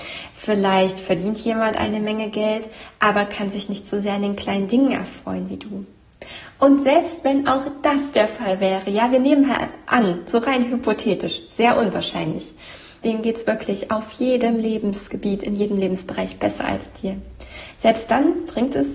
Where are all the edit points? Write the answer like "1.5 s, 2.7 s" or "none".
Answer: 13.0 s